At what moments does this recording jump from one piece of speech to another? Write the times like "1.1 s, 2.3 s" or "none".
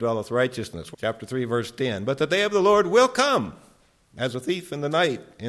0.9 s